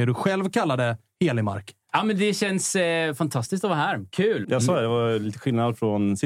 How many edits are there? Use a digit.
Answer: 1